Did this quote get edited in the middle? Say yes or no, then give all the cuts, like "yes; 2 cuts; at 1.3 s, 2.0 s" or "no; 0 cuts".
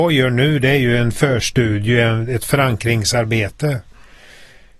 no; 0 cuts